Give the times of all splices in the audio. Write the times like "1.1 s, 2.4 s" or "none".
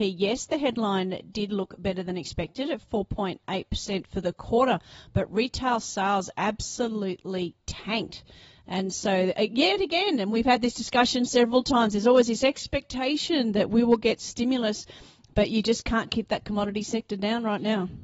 none